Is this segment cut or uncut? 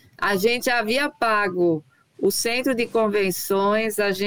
uncut